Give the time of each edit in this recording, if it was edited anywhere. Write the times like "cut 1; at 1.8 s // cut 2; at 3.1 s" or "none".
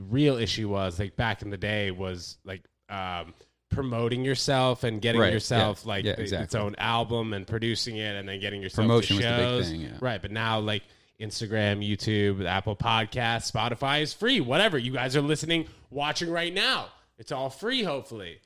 none